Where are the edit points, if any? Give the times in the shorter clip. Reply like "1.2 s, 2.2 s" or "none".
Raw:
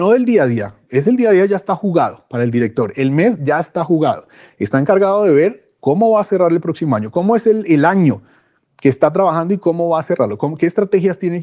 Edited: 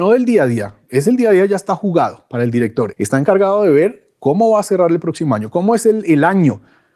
2.9 s